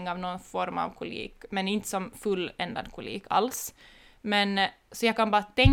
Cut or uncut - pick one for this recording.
uncut